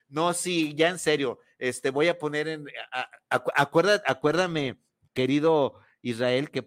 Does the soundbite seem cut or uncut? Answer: uncut